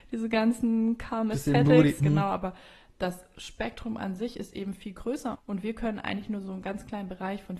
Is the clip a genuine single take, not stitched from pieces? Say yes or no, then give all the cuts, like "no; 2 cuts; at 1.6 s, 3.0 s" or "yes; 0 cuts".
no; 2 cuts; at 2.0 s, 5.3 s